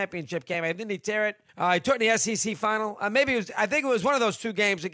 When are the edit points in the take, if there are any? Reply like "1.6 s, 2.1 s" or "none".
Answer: 1.5 s